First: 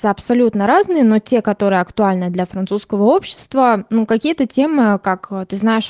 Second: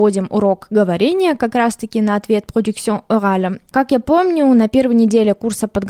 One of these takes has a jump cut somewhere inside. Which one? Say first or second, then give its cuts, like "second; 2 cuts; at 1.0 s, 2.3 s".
second; 1 cut; at 3.7 s